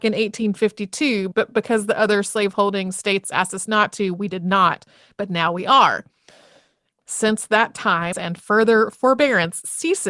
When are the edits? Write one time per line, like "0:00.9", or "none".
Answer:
0:06.9
0:08.1